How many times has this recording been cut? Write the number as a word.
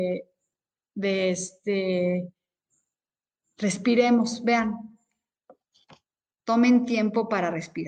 zero